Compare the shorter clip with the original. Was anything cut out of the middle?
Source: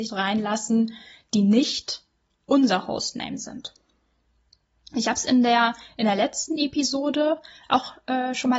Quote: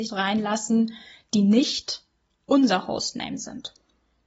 no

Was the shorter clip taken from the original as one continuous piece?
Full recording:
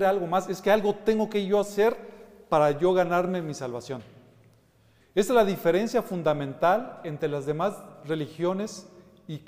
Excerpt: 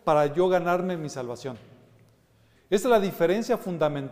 yes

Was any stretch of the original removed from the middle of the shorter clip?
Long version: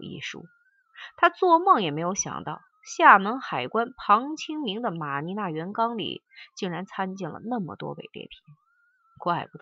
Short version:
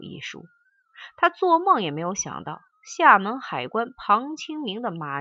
no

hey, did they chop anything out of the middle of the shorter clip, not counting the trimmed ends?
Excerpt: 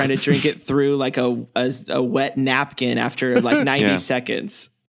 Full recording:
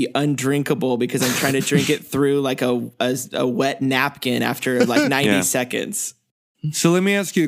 no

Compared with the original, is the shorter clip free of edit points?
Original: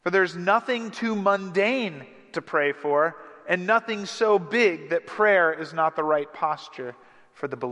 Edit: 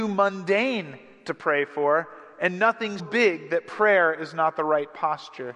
no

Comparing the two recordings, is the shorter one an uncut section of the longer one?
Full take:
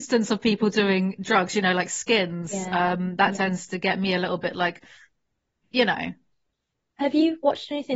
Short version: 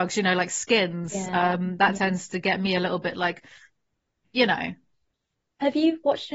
yes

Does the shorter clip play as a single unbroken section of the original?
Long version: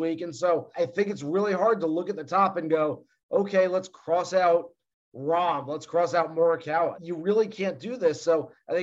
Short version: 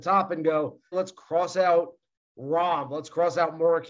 no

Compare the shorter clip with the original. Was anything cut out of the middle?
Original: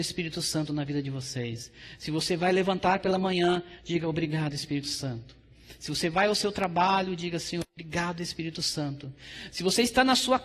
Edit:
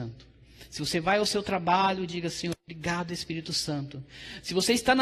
no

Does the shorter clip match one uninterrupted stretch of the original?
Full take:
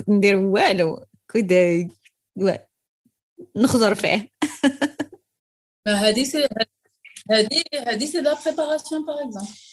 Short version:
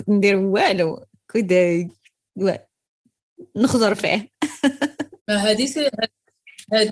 no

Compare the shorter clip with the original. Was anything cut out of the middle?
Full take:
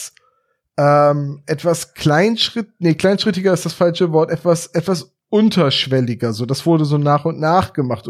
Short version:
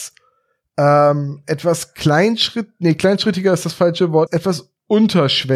yes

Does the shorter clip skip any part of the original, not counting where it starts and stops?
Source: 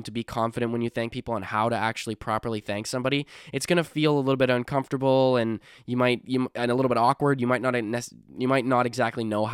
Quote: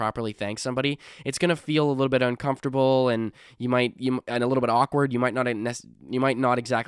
no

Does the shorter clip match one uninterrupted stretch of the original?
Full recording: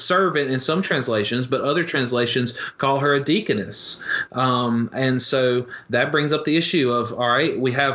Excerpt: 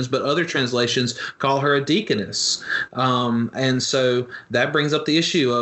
yes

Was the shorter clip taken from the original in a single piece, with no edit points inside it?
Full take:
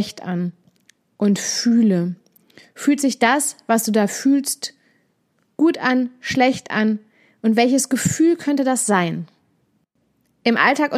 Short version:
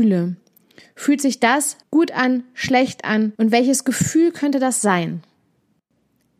no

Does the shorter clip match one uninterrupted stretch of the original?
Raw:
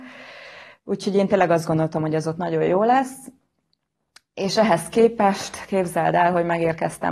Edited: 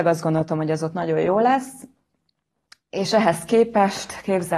yes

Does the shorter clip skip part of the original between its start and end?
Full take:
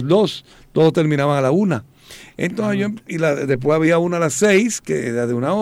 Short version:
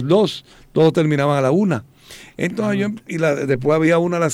no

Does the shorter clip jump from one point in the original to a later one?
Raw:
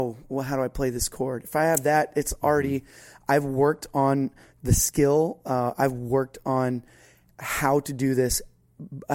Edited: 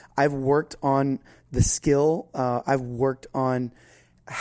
no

